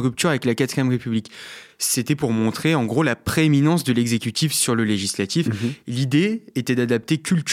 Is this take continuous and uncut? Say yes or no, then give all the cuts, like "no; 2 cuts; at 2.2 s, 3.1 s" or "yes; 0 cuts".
yes; 0 cuts